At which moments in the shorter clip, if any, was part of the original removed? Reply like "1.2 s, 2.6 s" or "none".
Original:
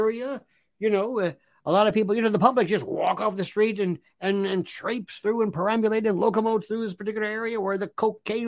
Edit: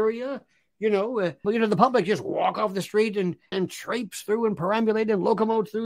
1.4 s, 3.5 s

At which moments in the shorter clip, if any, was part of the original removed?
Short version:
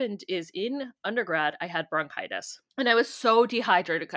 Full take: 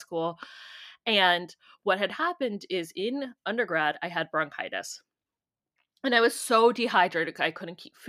2.7 s

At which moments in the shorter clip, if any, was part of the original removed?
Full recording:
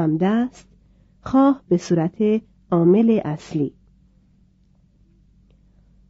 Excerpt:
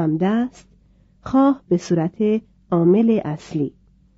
none

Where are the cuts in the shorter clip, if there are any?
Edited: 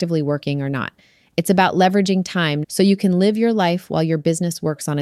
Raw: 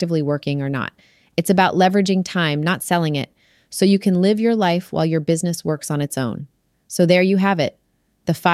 2.6 s

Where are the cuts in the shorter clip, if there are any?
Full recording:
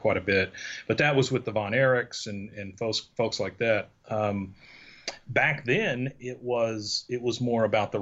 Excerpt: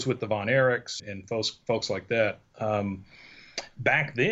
1.0 s

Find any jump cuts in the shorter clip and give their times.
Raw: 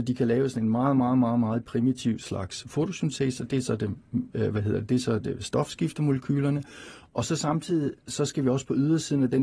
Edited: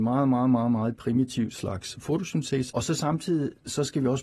2.7 s

